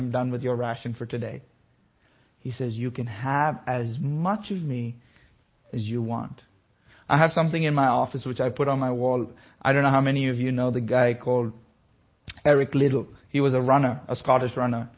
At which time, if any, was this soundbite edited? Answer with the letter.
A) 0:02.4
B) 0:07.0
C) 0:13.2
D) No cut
D